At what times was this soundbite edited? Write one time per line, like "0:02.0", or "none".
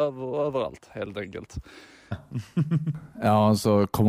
0:02.1